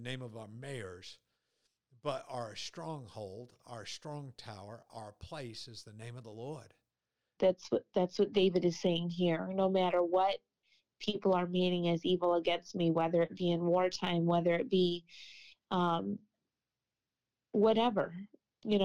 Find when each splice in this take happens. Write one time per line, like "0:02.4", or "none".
0:07.4